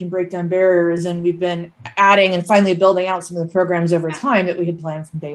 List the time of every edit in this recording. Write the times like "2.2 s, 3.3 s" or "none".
none